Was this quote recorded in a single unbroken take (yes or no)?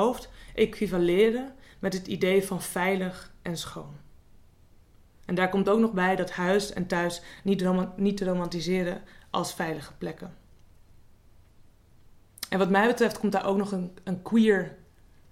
yes